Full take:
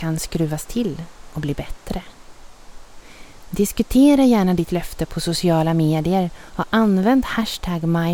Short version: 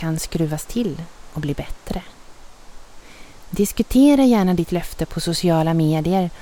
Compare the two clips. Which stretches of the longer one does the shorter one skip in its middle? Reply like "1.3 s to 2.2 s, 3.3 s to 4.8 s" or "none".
none